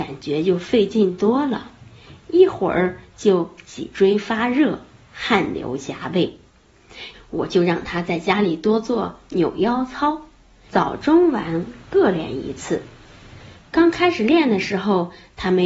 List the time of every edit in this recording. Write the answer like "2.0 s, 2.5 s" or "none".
7.1 s, 10.7 s